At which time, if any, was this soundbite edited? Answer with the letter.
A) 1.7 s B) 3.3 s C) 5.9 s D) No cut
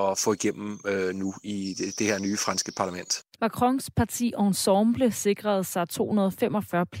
B